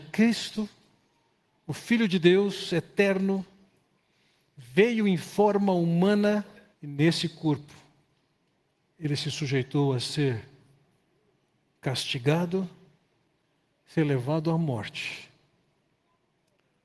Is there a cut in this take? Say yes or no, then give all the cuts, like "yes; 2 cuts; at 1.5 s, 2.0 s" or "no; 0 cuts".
yes; 1 cut; at 6.7 s